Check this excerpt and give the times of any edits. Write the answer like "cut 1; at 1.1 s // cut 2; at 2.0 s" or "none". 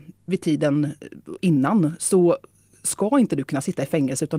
none